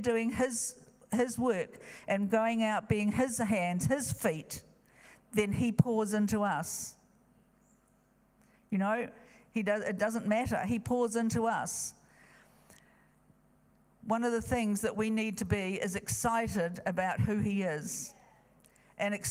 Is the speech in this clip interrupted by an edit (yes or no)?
no